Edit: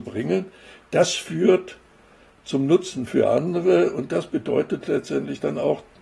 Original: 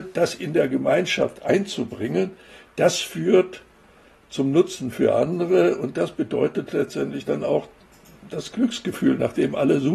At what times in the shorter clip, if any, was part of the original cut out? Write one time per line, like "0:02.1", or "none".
none